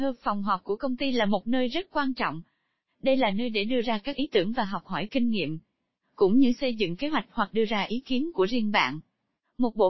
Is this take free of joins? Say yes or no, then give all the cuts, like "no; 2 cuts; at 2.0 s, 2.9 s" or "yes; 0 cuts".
yes; 0 cuts